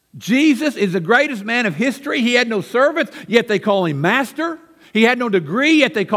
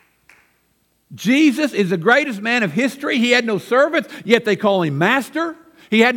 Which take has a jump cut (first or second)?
second